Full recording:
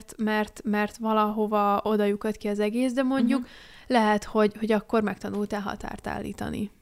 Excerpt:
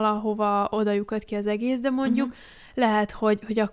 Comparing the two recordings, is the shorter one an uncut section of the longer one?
yes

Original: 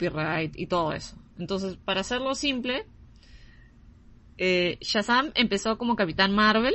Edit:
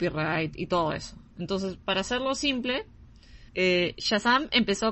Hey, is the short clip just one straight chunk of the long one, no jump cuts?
no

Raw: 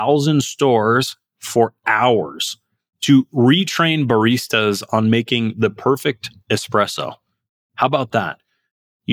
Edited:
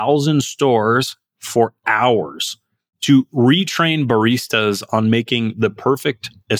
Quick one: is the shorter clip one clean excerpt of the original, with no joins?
yes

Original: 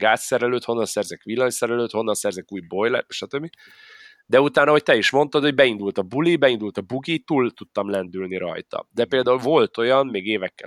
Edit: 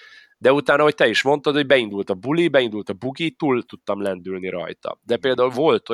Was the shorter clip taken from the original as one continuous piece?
yes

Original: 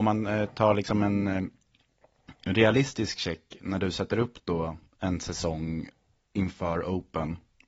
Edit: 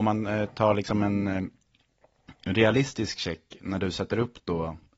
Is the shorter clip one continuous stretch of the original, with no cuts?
yes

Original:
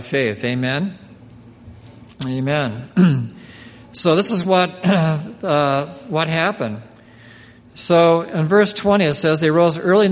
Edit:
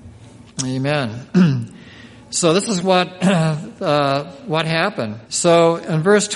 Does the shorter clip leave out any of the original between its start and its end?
yes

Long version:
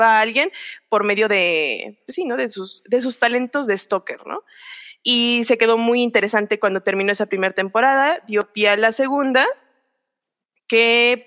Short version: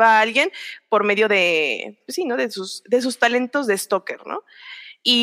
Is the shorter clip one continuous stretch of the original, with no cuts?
yes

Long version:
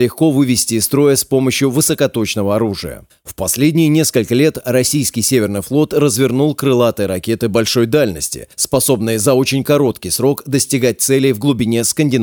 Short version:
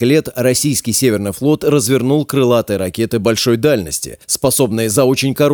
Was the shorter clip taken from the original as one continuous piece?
yes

